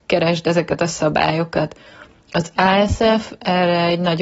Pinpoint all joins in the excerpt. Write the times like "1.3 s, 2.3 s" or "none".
none